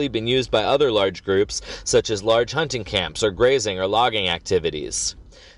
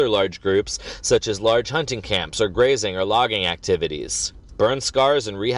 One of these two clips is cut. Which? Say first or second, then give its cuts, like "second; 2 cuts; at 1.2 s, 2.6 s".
second; 1 cut; at 4.5 s